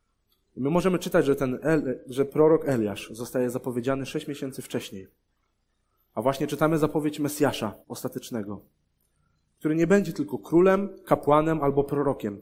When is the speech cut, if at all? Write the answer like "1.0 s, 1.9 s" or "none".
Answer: 7.8 s